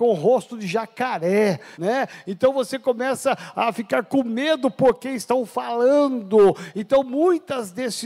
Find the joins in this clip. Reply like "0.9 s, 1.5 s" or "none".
1.7 s

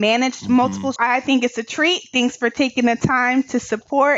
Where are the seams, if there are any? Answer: 1.0 s

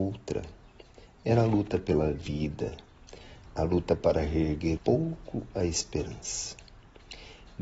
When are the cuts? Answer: 3.5 s, 4.8 s

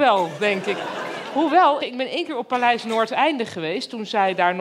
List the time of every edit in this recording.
1.8 s

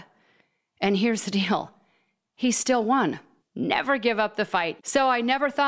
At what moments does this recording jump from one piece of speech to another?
3.4 s, 4.8 s

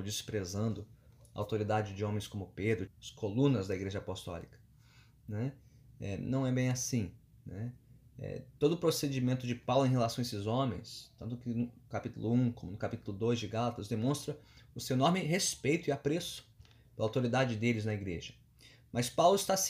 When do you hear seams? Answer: 2.9 s

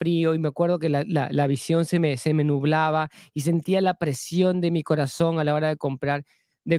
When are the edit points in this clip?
none

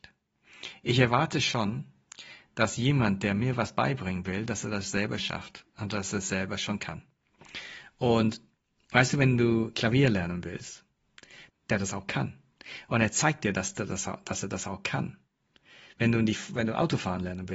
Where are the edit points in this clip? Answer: 5.2 s, 11.5 s

